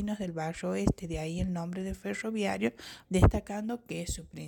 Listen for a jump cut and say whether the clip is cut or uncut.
cut